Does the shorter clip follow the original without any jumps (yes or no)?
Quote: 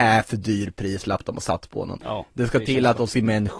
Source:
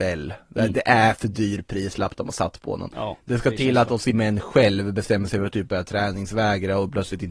yes